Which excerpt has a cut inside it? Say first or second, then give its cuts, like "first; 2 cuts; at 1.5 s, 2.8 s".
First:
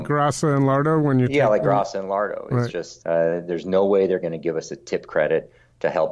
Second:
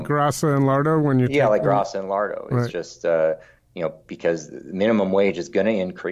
first; 1 cut; at 3.0 s